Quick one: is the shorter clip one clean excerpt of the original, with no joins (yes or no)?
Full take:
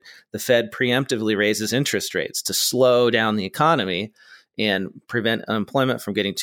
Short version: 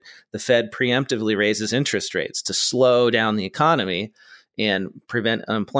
yes